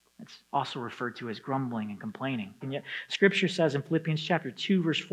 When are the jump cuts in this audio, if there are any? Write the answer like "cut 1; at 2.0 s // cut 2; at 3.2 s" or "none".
cut 1; at 2.6 s